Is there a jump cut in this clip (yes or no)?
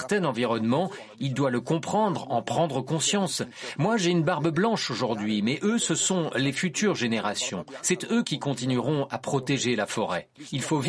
no